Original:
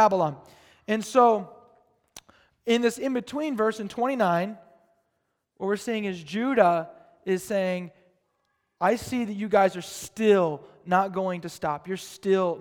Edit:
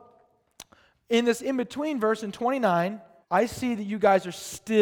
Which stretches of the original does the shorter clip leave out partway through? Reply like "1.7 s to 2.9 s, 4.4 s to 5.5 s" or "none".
4.8 s to 8.7 s